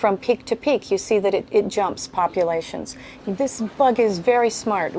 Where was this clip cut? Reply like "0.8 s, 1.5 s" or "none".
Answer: 3.2 s